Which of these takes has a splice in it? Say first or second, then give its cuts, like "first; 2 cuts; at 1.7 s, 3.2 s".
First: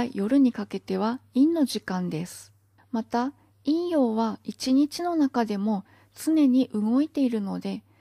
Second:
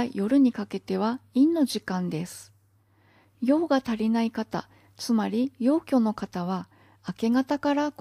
first; 1 cut; at 2.8 s